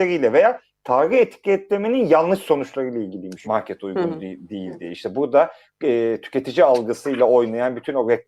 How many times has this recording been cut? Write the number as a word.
one